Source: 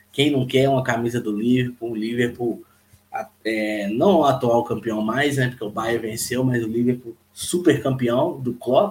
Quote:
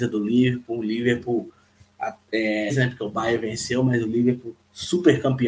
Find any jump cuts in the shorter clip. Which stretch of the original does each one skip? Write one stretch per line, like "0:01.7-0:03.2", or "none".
0:03.8-0:05.3